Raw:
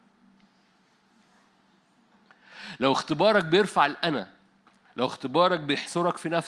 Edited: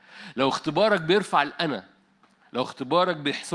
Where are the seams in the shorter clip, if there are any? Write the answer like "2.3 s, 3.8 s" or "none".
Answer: none

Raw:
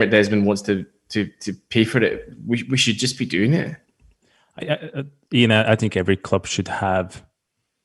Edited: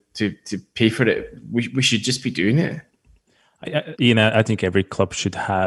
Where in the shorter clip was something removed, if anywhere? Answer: 4.0 s

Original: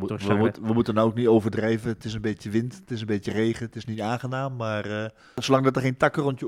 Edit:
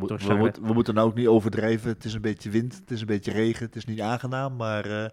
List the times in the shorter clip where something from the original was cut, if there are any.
none

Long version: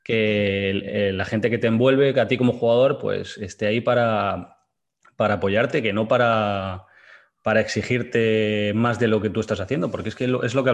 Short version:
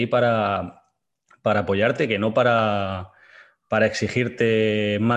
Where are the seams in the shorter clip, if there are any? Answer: none

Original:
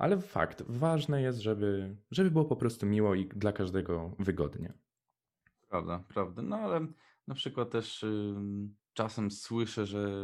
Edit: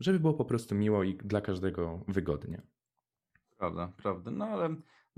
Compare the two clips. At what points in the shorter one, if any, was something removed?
none

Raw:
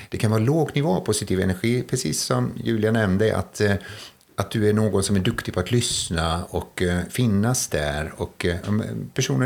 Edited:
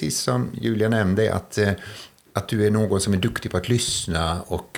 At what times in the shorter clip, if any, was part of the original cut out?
none

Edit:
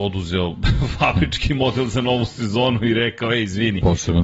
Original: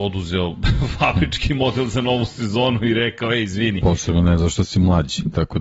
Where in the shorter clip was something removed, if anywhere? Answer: none

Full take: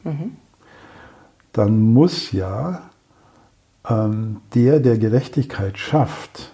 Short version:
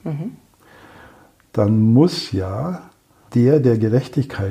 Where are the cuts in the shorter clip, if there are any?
3.3 s

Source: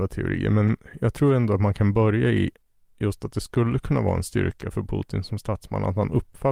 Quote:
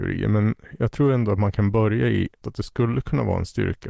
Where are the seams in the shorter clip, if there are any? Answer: 2.4 s

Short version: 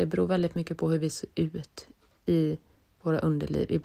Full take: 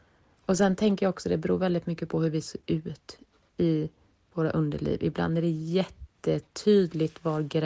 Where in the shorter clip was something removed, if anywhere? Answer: none

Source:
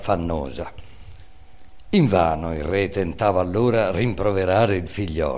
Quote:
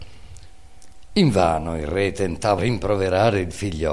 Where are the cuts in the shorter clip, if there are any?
2.6 s

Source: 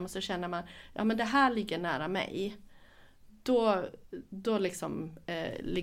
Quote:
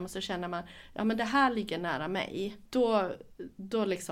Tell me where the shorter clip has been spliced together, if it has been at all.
2.7 s

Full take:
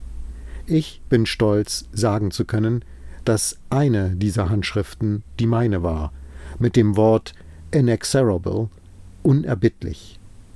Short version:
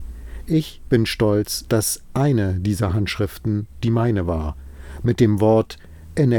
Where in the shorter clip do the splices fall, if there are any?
1.7 s

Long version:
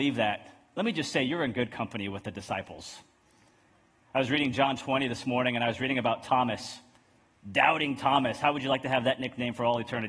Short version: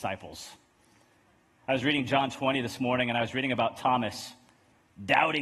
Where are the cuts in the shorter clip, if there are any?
none

